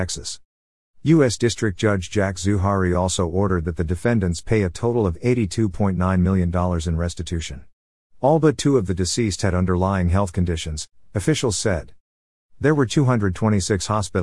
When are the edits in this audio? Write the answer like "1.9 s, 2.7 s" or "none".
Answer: 8.0 s